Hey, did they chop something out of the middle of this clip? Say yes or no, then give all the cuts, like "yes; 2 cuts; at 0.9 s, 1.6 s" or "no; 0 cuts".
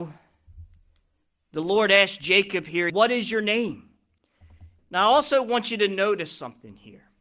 yes; 2 cuts; at 2.9 s, 4.8 s